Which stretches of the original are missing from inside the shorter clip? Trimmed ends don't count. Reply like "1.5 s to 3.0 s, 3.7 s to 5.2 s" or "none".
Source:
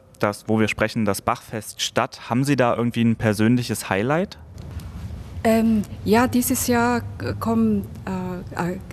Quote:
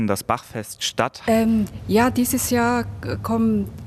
2.2 s to 5.4 s